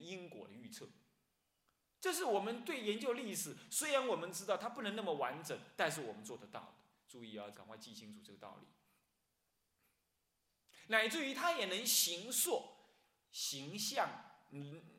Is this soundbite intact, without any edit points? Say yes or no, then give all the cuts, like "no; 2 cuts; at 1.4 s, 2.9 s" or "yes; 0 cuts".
no; 1 cut; at 7.5 s